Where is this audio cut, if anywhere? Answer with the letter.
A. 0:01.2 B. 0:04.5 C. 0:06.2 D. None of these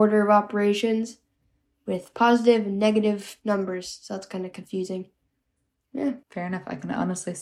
C